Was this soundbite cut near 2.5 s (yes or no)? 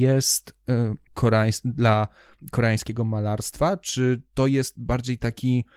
no